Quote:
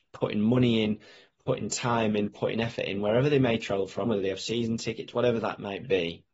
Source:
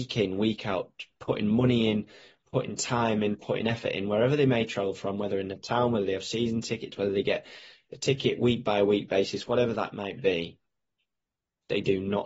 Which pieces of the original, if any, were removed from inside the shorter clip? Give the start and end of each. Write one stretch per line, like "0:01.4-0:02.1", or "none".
0:05.1-0:05.9
0:07.0-0:09.5